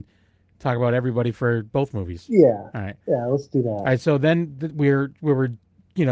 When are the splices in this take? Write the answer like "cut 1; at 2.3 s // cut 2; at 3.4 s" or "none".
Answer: none